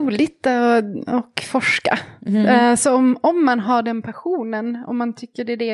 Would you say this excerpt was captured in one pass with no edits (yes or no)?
yes